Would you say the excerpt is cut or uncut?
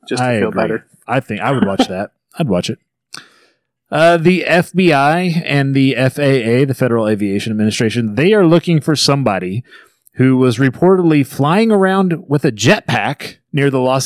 uncut